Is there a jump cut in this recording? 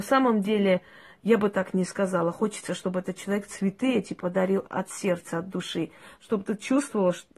no; 0 cuts

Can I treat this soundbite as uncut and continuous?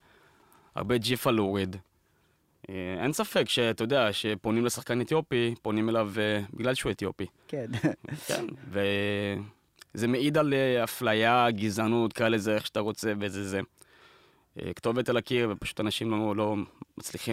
yes; 0 cuts

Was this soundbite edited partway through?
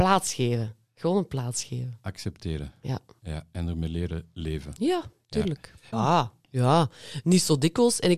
yes; 1 cut; at 5.9 s

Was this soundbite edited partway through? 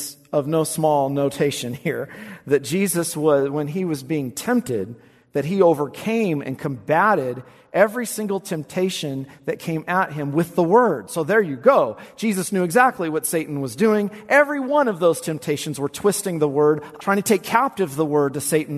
yes; 1 cut; at 17.0 s

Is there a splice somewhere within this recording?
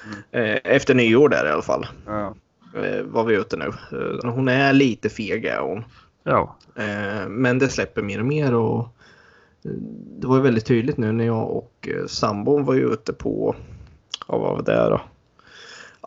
yes; 1 cut; at 4.2 s

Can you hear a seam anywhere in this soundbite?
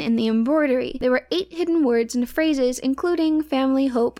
no; 0 cuts

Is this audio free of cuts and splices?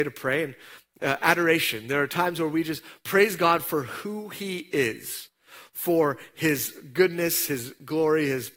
yes; 0 cuts

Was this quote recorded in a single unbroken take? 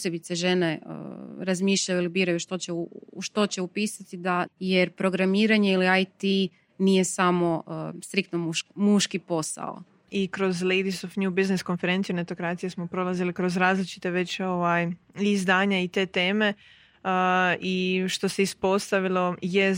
no; 1 cut; at 4.5 s

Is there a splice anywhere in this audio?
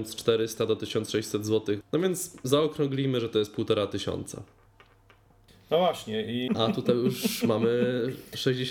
yes; 2 cuts; at 1.8 s, 6.5 s

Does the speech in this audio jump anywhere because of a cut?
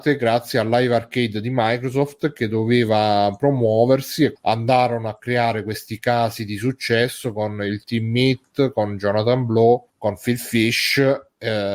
yes; 1 cut; at 4.4 s

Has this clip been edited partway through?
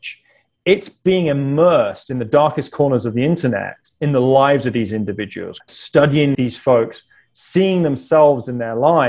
yes; 1 cut; at 5.6 s

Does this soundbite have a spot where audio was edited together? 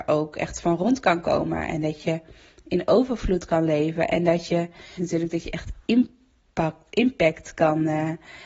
yes; 1 cut; at 5.0 s

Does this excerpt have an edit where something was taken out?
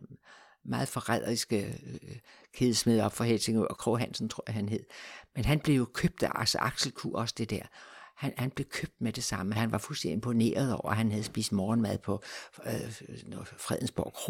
yes; 2 cuts; at 3.8 s, 9.6 s

